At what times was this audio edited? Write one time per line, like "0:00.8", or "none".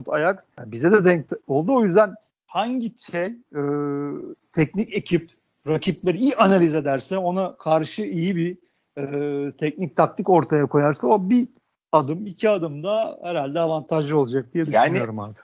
none